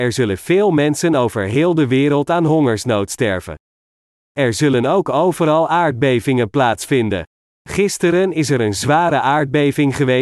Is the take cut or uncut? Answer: uncut